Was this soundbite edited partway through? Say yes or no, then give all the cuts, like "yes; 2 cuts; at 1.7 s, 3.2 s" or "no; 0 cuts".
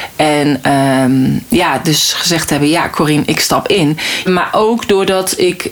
yes; 1 cut; at 4.3 s